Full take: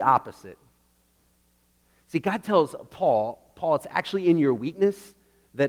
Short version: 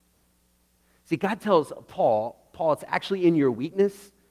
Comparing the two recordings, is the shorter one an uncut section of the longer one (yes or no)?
yes